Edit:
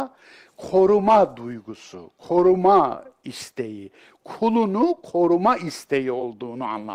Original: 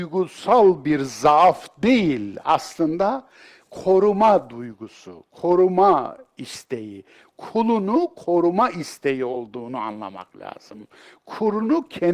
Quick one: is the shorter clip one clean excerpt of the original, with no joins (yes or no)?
yes